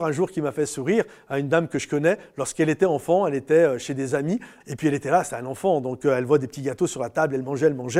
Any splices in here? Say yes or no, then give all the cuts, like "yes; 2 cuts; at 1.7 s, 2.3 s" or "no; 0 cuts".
yes; 1 cut; at 4.6 s